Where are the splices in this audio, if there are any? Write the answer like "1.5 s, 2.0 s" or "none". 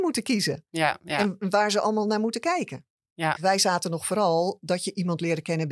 3.4 s